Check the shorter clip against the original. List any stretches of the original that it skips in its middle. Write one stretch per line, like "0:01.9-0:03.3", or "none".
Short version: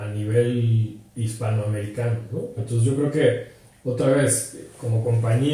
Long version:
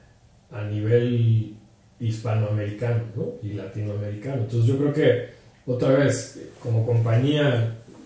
0:01.6-0:01.9
0:03.4-0:04.4